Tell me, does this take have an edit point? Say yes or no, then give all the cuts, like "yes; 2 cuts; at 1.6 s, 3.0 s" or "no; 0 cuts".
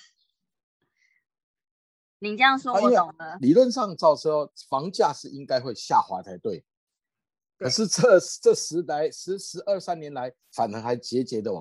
yes; 2 cuts; at 3.4 s, 10.4 s